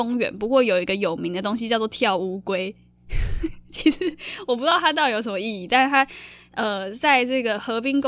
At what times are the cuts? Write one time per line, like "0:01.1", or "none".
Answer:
none

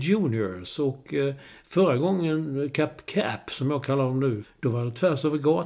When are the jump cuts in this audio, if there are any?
0:04.4

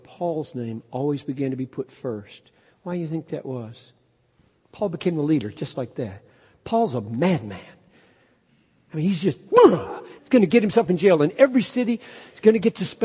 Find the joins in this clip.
0:10.2

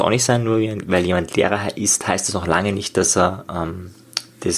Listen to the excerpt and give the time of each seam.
none

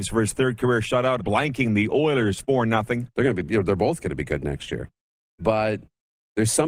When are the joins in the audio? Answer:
0:01.2
0:03.1
0:05.2

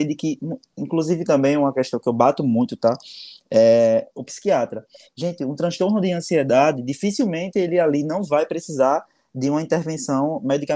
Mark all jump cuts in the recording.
none

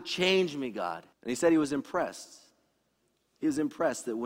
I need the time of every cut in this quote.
0:01.1

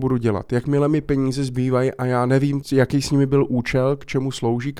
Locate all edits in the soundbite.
0:02.6

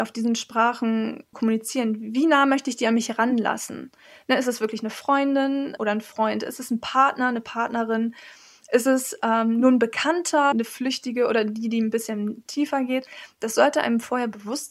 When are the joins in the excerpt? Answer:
0:10.5

